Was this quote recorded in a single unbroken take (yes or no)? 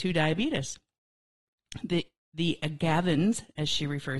yes